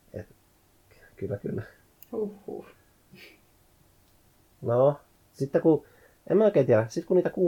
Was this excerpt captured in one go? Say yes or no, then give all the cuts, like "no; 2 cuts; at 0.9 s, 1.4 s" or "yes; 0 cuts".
yes; 0 cuts